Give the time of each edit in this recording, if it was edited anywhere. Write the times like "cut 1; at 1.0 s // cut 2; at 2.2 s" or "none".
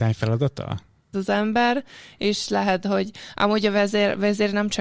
cut 1; at 1.1 s

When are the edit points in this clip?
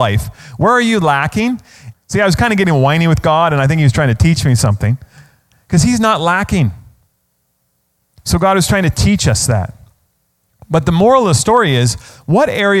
cut 1; at 1.9 s

